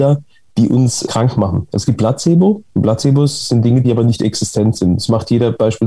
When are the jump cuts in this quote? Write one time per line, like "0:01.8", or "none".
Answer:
0:01.1
0:02.7
0:03.8